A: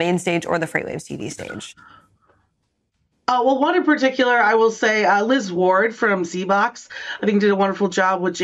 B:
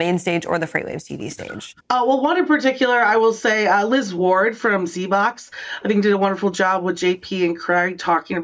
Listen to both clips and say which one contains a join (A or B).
B